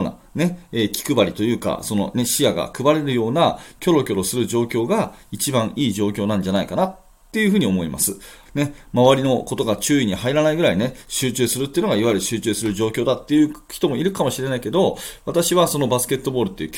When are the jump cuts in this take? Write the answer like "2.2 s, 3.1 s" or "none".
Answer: 8.4 s